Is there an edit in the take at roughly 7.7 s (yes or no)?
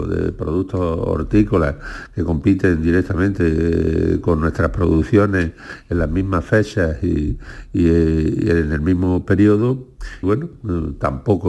no